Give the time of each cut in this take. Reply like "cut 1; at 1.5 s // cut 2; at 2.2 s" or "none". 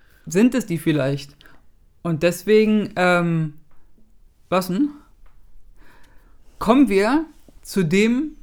none